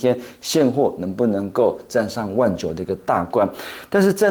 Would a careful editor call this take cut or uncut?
uncut